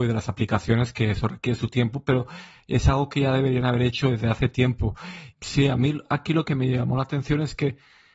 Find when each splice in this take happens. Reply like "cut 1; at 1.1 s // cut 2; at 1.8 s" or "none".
cut 1; at 5.3 s